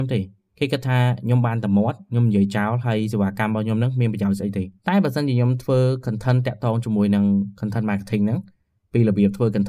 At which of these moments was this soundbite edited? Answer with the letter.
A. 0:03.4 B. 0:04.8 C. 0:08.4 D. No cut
B